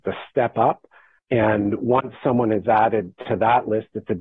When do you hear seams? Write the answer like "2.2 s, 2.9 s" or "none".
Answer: 1.2 s